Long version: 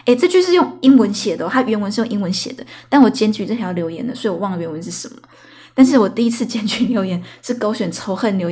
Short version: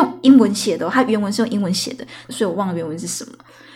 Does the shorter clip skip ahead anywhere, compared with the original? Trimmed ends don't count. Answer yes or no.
yes